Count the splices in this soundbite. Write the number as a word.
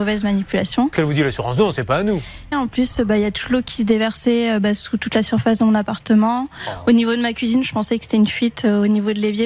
two